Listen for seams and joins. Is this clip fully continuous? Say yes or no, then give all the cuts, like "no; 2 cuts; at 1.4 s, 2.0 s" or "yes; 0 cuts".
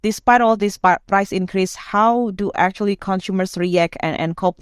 yes; 0 cuts